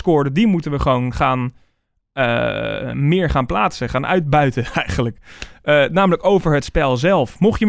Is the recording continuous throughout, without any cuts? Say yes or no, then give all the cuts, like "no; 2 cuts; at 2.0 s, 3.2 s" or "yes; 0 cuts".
yes; 0 cuts